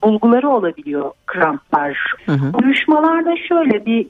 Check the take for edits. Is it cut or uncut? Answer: cut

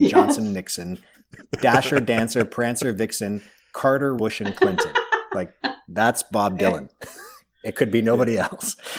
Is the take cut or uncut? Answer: cut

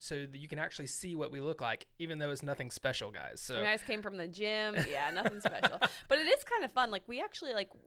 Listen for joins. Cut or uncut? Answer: uncut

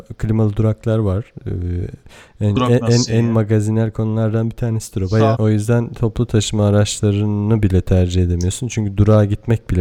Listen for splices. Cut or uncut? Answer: cut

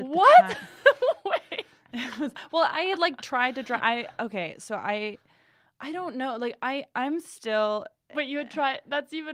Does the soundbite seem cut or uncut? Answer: uncut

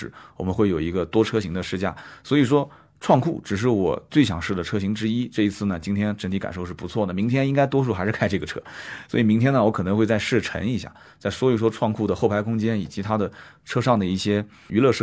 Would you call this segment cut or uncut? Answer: uncut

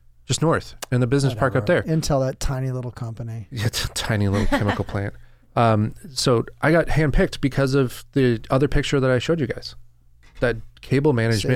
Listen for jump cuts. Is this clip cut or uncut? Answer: uncut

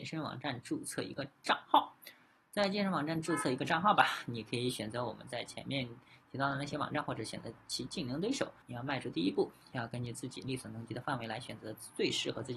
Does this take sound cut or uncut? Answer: cut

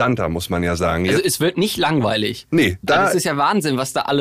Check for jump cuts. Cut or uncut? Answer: cut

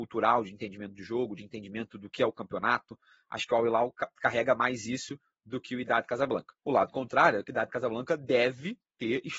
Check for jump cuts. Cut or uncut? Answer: cut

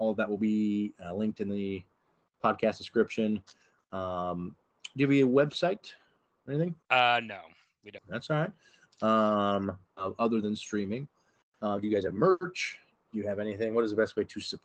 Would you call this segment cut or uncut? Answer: cut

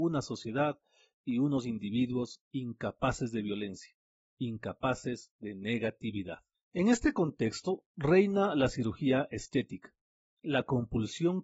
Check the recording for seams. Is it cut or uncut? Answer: uncut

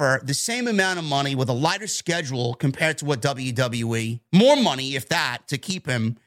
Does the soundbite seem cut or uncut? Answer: uncut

